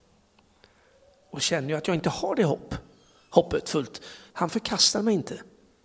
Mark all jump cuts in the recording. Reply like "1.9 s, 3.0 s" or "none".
4.3 s